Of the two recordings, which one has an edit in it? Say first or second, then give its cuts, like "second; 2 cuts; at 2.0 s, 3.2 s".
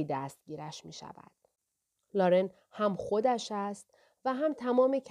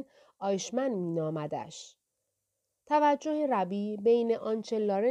first; 1 cut; at 2.0 s